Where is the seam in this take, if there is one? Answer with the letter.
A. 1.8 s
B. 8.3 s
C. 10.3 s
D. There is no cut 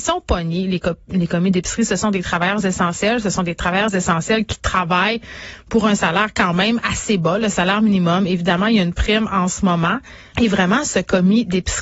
C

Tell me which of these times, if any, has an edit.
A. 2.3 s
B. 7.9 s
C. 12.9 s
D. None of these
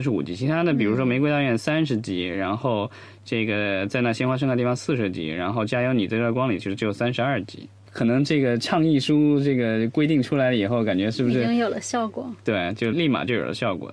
C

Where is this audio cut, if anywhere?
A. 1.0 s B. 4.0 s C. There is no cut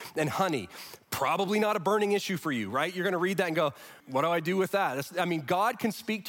B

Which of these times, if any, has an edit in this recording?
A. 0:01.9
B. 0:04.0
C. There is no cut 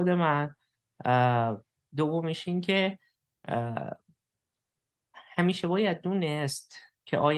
A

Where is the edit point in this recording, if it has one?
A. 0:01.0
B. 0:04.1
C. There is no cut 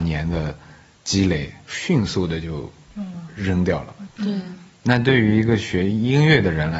B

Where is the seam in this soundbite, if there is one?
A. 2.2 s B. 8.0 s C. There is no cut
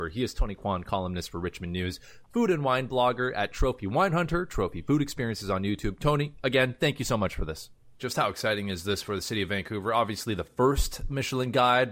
B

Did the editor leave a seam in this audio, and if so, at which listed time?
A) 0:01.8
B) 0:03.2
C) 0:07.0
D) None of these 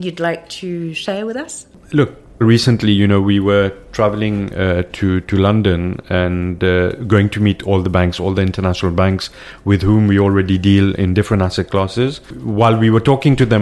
D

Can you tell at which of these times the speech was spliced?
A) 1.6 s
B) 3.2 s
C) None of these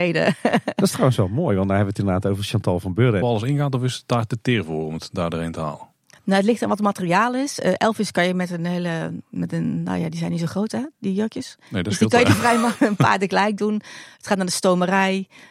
B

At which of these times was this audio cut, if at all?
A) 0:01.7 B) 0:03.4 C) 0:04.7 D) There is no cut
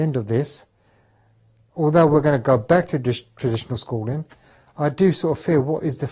A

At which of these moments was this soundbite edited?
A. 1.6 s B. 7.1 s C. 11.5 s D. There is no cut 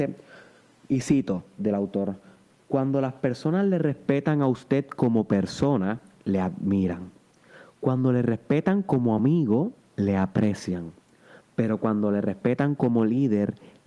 A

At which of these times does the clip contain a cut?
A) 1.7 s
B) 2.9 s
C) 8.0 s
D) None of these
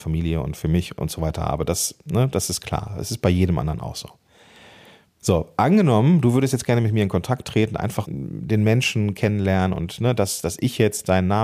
C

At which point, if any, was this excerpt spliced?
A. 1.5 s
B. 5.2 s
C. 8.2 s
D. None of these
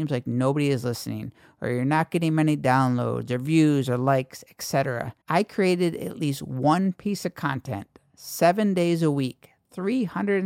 B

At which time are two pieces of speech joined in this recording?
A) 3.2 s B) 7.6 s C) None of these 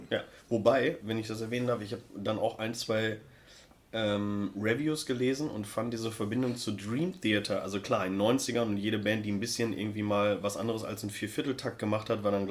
C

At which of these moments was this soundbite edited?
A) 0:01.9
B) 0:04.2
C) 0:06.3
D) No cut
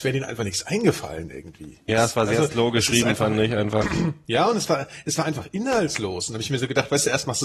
A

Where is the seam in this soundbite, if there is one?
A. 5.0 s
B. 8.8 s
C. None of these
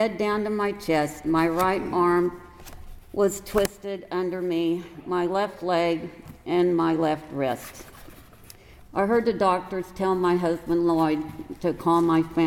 B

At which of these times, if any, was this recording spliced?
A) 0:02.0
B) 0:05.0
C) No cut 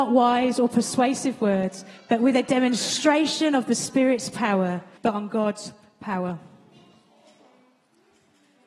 B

